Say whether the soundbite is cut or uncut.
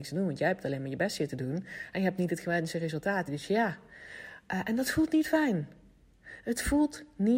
uncut